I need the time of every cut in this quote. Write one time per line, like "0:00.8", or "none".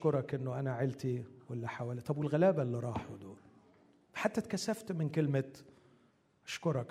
none